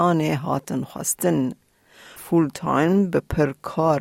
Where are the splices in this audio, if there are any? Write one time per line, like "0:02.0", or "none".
0:02.2